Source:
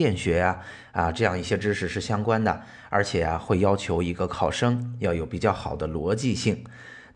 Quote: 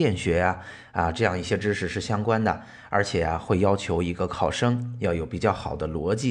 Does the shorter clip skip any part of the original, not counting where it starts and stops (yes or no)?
no